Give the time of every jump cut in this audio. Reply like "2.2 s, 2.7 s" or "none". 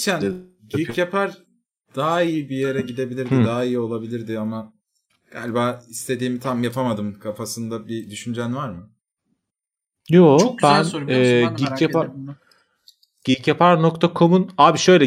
none

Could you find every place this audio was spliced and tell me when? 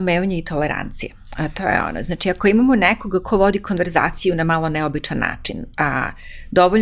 none

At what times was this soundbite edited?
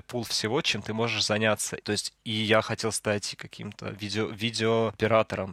1.8 s

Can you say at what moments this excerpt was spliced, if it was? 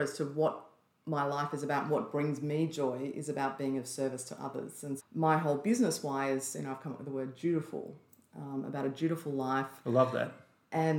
5.0 s

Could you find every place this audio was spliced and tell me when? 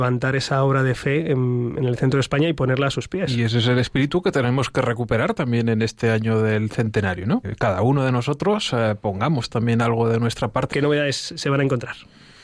7.4 s, 10.7 s

